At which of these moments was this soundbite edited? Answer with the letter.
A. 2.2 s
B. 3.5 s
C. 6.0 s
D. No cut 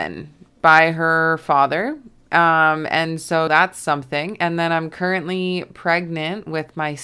B